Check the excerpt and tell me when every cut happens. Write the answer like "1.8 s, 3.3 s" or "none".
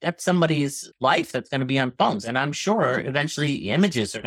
none

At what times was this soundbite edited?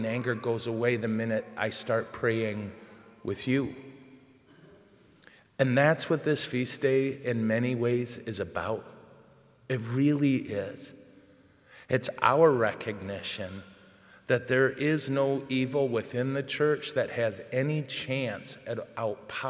none

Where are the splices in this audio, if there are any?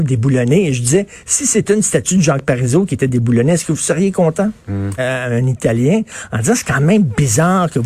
5.0 s

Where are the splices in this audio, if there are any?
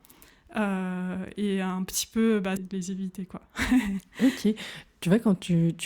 2.6 s

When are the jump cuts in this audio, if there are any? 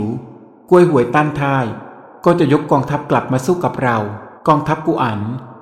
4.4 s

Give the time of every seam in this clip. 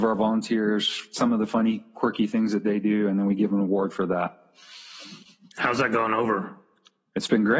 none

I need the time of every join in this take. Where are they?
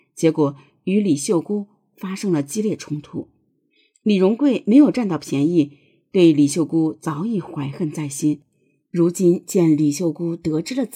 none

